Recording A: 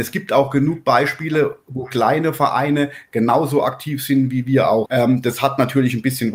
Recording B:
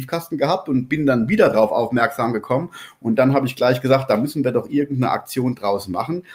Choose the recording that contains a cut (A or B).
A